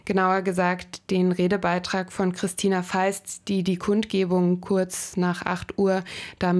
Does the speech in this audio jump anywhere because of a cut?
no; 0 cuts

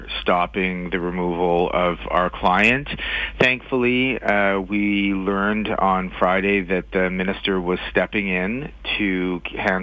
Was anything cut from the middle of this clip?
no; 0 cuts

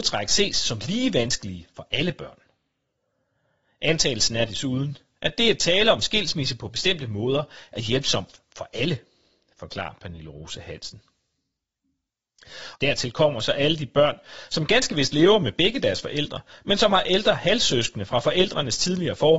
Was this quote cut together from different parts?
yes; 1 cut; at 12.7 s

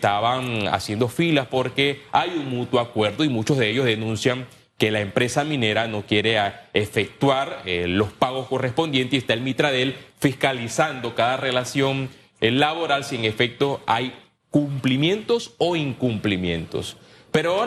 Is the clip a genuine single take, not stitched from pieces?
yes; 0 cuts

